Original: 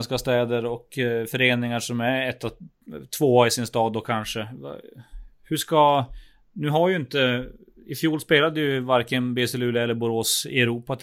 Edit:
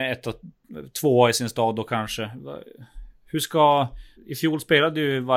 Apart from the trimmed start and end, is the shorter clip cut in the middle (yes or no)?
yes